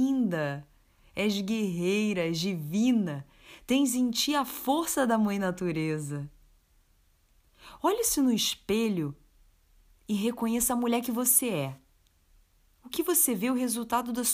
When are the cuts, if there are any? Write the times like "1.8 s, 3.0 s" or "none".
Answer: none